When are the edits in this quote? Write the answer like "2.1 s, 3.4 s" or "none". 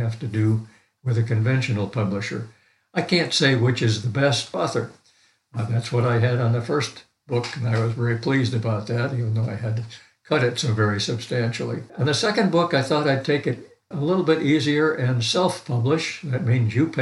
4.5 s, 11.9 s, 13.9 s